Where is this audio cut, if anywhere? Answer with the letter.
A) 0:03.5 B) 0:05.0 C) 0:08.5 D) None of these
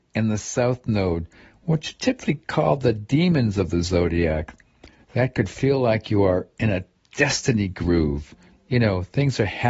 B